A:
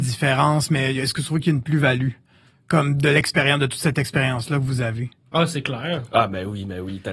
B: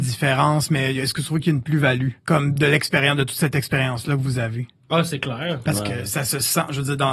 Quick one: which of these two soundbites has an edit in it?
B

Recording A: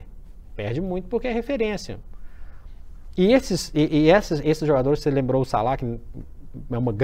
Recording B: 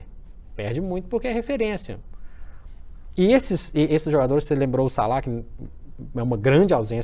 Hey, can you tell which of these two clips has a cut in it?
B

